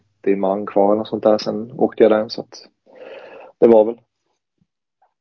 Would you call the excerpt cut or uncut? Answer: uncut